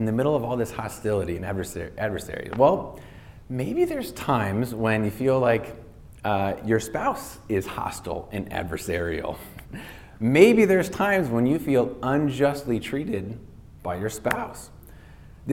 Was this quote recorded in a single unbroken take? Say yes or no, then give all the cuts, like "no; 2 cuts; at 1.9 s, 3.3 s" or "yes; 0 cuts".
yes; 0 cuts